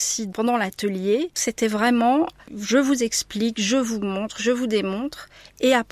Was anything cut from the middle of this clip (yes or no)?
no